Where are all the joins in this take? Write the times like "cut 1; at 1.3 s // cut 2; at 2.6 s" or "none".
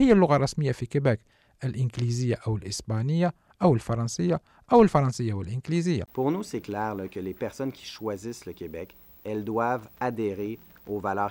none